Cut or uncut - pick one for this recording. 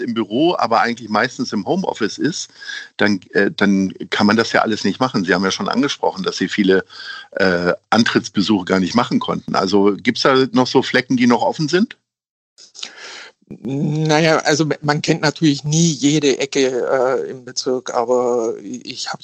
uncut